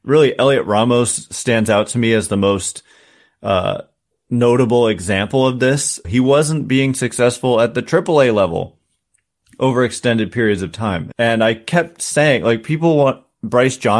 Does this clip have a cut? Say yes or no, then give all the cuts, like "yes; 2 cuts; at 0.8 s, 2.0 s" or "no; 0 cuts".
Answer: yes; 2 cuts; at 6.0 s, 11.1 s